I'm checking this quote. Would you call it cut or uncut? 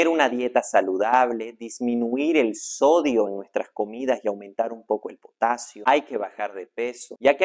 uncut